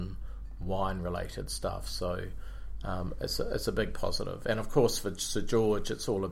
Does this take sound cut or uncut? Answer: uncut